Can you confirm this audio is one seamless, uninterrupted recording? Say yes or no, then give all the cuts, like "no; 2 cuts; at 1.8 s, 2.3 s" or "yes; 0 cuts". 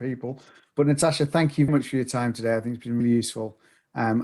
no; 2 cuts; at 1.7 s, 3.0 s